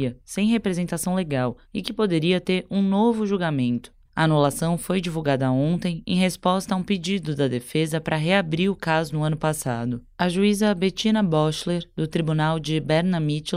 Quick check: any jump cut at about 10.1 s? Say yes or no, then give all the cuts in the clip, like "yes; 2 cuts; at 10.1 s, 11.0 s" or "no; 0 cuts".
no; 1 cut; at 4.1 s